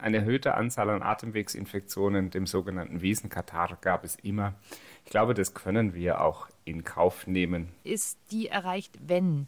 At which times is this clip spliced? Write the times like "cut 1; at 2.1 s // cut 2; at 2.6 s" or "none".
cut 1; at 7.8 s